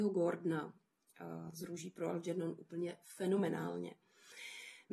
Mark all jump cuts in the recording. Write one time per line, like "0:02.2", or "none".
none